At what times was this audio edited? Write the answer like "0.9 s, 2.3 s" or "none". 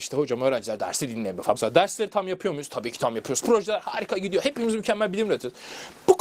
1.6 s, 3.4 s